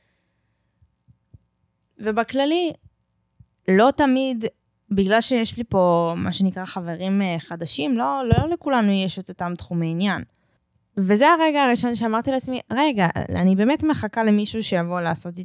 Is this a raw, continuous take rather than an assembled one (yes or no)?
yes